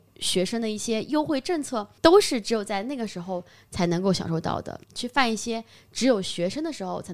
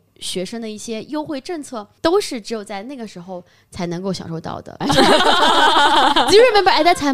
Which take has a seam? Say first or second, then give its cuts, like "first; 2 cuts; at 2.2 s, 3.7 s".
second; 1 cut; at 4.8 s